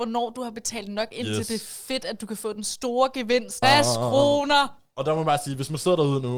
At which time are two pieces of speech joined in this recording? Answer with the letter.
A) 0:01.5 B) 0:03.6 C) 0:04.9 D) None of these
B